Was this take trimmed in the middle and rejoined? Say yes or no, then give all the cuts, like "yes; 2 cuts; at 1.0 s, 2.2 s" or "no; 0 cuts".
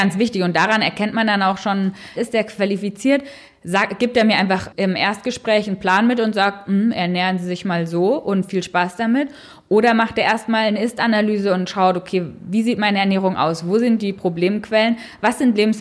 yes; 1 cut; at 2.1 s